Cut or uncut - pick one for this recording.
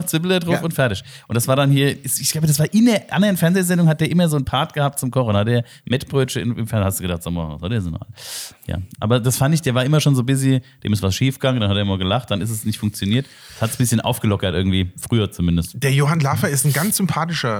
uncut